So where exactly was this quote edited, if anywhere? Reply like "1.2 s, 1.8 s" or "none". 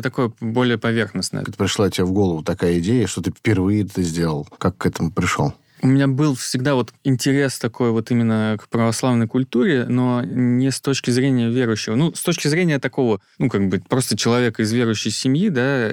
1.5 s